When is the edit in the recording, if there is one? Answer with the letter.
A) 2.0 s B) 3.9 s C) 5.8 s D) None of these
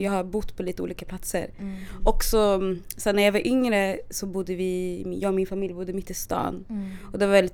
D